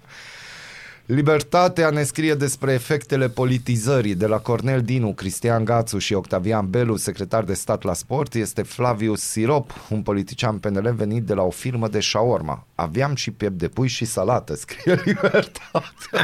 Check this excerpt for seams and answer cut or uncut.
uncut